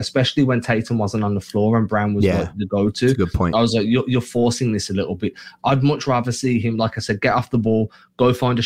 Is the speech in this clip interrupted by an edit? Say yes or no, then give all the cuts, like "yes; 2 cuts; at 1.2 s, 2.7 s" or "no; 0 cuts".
no; 0 cuts